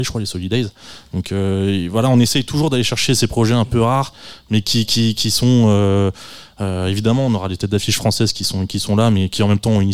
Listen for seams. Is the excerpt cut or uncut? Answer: uncut